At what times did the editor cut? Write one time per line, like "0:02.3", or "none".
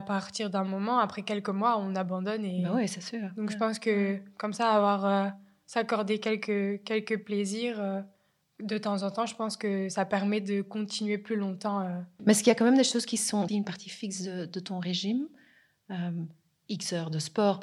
0:12.2
0:13.5